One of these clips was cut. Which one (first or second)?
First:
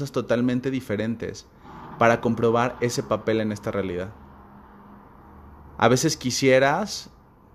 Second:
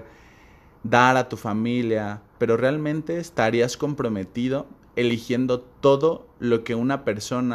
second